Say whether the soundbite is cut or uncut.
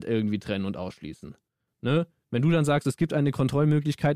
uncut